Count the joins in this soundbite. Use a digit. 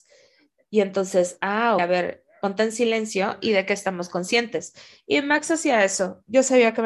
1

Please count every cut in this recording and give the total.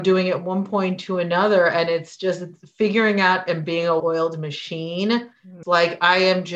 2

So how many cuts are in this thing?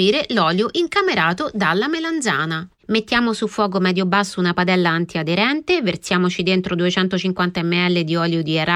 0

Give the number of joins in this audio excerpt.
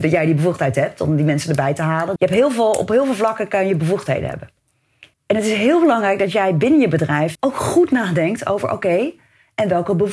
3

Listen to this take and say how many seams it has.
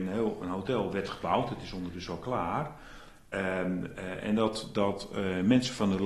0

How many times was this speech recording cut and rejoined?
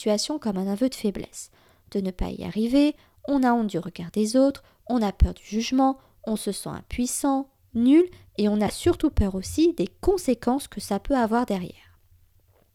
0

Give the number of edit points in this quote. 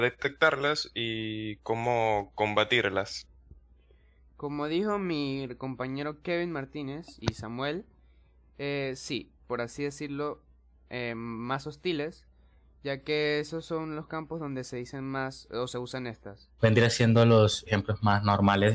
3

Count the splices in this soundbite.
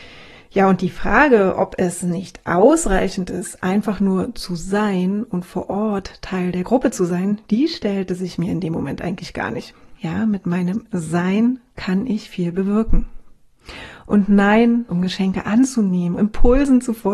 3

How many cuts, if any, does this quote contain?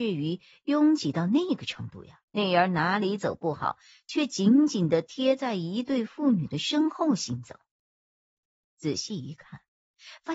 1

